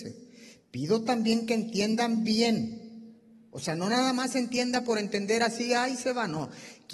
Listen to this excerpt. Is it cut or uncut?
uncut